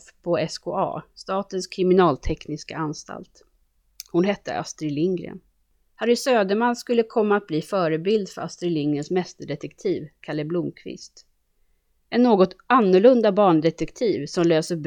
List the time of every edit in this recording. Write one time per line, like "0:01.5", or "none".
none